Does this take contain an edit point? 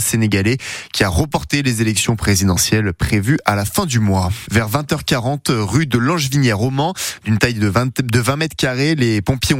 yes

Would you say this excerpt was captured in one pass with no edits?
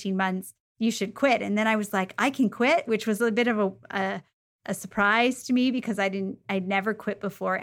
yes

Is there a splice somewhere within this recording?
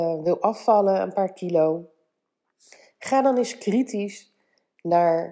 no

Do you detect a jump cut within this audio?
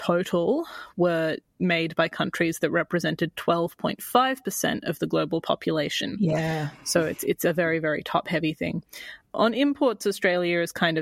no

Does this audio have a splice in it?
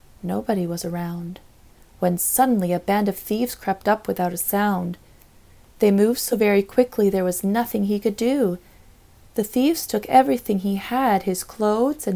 no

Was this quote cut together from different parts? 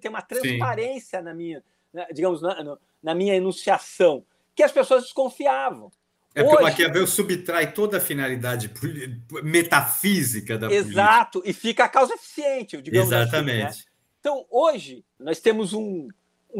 yes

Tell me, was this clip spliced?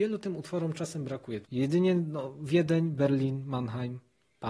yes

